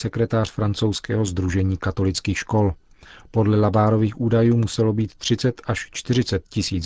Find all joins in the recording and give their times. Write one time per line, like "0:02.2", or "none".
none